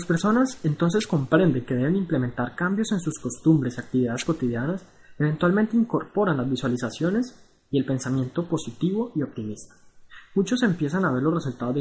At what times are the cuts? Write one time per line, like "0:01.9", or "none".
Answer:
none